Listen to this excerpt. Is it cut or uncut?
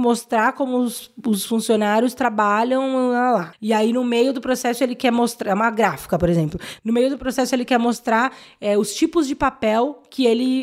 uncut